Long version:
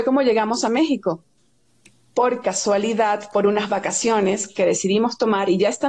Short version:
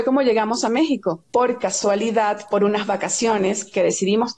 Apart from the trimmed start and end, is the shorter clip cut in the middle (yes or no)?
yes